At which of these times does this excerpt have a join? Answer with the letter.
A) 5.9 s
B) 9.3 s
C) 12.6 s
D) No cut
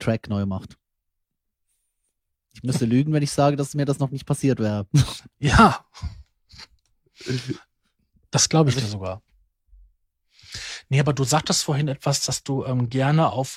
B